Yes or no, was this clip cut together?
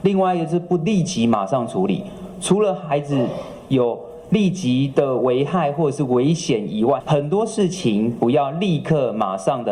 no